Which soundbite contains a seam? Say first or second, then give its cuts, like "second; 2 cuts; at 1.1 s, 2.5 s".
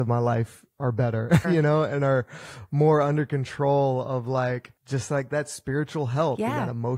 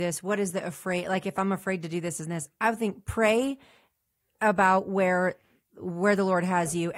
first; 2 cuts; at 1.4 s, 4.8 s